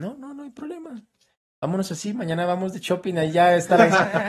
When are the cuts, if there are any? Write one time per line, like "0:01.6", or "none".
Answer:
none